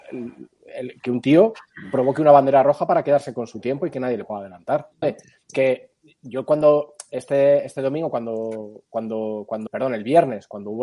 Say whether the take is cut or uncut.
cut